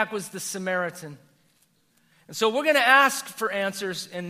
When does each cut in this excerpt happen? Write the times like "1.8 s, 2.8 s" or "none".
none